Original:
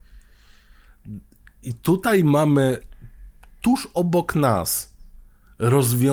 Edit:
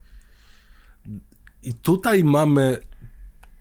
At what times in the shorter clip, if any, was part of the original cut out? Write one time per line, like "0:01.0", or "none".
none